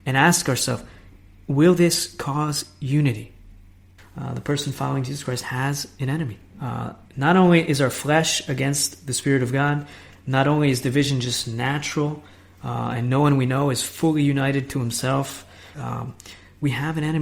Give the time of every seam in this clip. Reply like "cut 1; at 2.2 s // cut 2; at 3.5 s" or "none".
cut 1; at 4.0 s // cut 2; at 6.4 s // cut 3; at 15.7 s

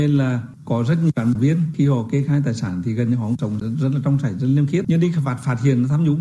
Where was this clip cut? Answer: cut 1; at 3.6 s

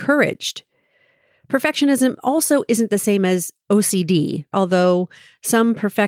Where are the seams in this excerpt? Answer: cut 1; at 4.5 s

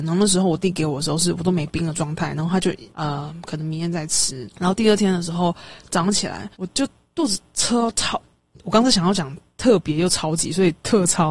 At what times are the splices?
cut 1; at 2.9 s // cut 2; at 4.5 s // cut 3; at 6.5 s

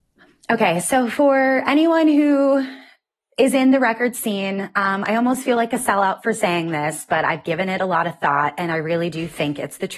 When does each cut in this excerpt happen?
none

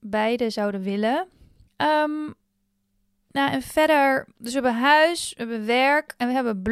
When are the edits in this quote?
cut 1; at 1.7 s

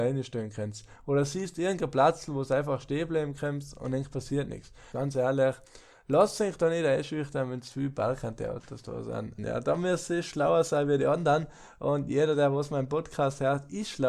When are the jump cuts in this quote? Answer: cut 1; at 4.9 s // cut 2; at 9.4 s

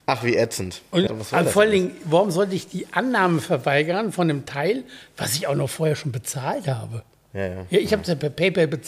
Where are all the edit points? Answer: cut 1; at 1.1 s

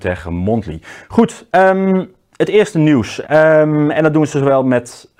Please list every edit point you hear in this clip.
cut 1; at 3.2 s

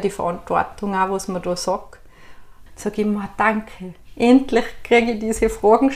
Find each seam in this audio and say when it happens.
cut 1; at 2.7 s

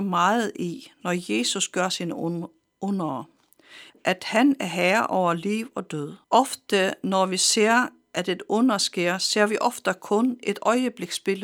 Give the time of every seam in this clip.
cut 1; at 3.9 s // cut 2; at 6.2 s

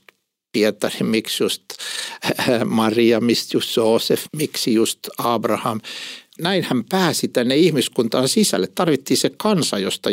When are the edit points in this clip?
cut 1; at 4.3 s // cut 2; at 6.4 s

